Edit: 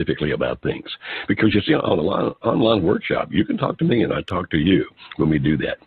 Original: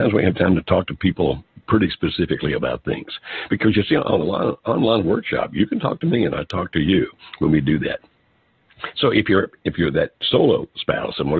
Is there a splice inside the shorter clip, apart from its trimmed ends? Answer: no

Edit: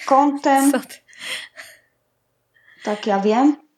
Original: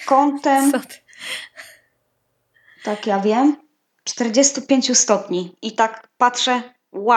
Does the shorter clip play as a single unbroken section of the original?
yes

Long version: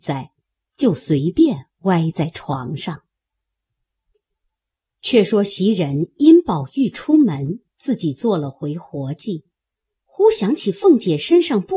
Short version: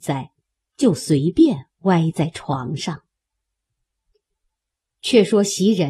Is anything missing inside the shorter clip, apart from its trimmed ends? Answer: no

